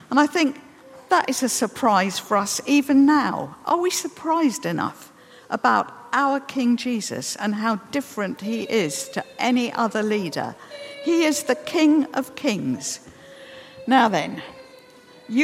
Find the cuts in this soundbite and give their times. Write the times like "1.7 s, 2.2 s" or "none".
none